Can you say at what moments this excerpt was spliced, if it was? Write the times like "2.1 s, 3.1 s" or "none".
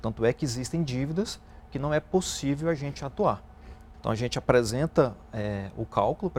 3.9 s